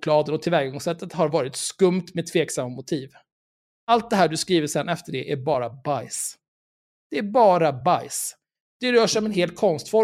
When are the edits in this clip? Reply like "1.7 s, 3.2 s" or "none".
none